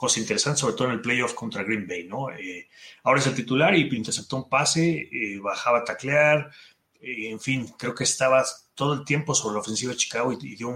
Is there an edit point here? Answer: no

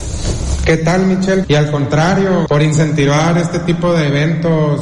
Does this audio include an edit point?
yes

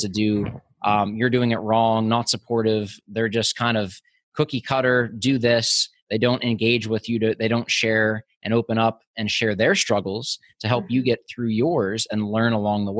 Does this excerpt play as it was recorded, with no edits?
yes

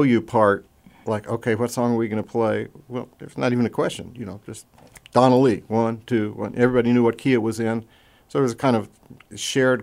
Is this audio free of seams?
yes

